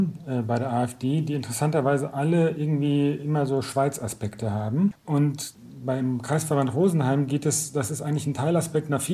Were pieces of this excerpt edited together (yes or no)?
no